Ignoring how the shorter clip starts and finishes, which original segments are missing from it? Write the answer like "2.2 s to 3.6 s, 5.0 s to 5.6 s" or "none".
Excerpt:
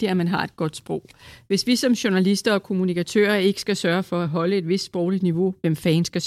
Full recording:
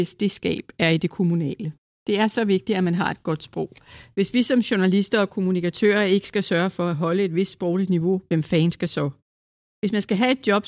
none